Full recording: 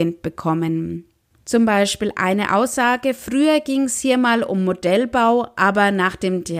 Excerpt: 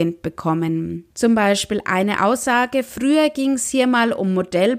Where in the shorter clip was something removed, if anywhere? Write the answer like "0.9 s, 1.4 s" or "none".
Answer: 1.1 s